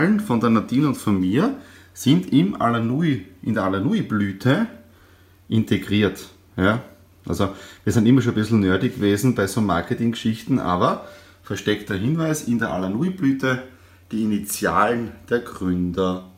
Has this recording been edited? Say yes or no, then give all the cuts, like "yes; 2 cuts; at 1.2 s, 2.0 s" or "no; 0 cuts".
no; 0 cuts